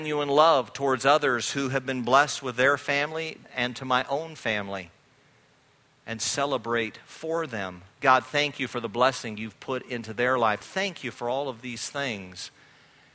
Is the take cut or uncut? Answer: cut